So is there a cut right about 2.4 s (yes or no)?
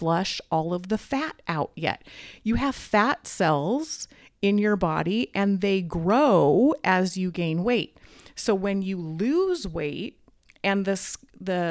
no